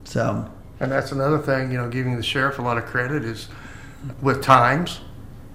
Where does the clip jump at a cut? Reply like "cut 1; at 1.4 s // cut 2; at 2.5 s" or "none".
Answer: cut 1; at 4.1 s